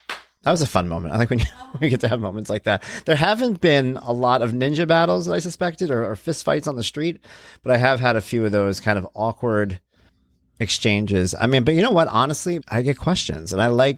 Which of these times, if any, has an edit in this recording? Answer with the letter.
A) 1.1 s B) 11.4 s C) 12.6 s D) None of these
C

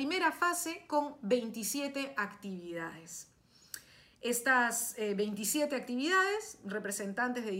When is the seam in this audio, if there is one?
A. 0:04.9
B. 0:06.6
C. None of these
C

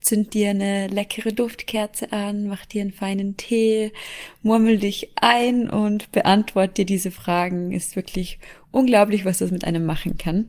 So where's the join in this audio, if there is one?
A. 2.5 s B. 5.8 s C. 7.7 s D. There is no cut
D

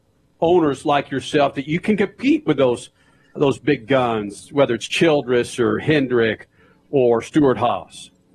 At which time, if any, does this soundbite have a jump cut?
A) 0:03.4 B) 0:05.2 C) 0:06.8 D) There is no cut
A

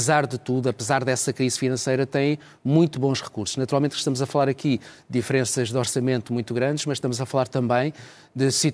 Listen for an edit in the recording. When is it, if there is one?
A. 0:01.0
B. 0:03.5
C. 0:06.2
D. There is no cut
D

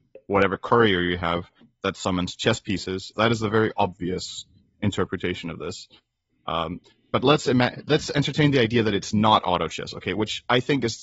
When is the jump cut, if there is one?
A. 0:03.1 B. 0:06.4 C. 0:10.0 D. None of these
A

